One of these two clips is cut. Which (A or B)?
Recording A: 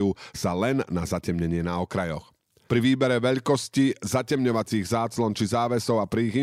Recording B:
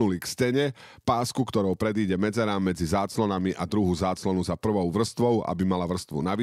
A